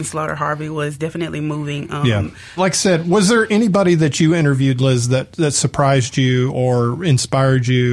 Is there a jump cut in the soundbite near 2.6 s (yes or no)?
yes